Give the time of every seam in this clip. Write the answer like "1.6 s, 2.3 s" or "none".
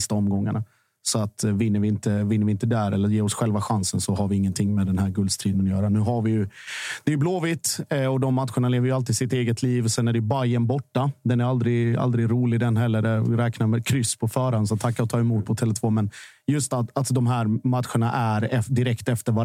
none